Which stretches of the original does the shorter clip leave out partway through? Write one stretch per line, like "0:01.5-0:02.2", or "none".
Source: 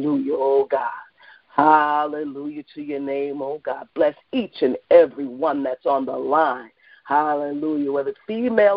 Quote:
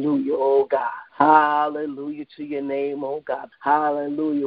0:01.1-0:01.5
0:03.9-0:07.0